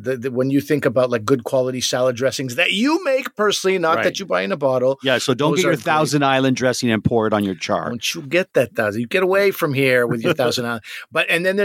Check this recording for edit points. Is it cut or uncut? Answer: uncut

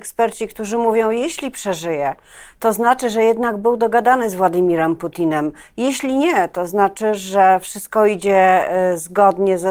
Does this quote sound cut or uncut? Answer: uncut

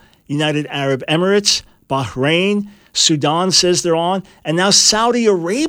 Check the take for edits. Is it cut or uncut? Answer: uncut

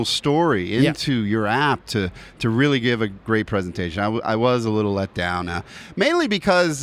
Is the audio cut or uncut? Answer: uncut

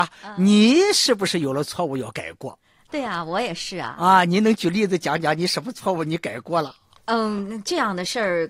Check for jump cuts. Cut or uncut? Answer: uncut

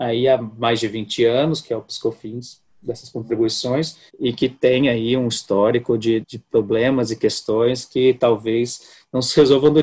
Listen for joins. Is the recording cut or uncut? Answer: cut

